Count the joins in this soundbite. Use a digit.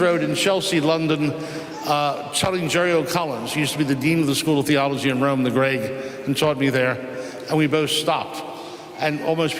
0